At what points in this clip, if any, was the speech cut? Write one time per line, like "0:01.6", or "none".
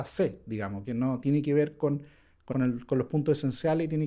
0:02.5